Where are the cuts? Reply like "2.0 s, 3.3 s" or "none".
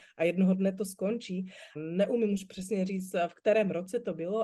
1.8 s